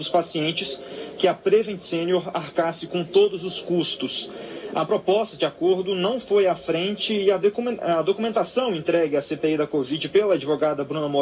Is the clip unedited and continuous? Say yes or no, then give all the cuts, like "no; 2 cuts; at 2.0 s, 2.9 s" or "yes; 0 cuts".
yes; 0 cuts